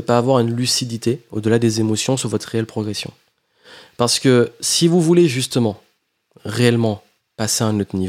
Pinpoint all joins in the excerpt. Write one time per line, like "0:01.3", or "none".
none